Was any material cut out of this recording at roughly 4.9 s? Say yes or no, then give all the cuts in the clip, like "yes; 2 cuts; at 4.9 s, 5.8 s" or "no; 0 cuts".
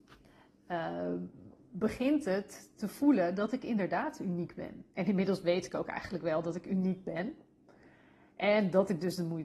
yes; 1 cut; at 4.9 s